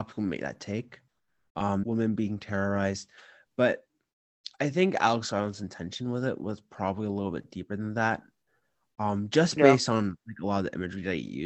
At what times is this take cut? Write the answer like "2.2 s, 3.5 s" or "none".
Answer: 1.8 s